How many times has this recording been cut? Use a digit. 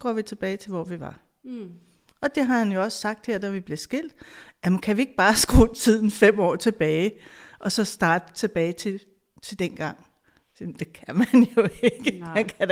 0